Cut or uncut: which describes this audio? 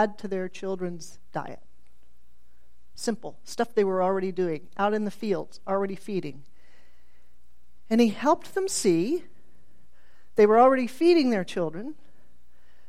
uncut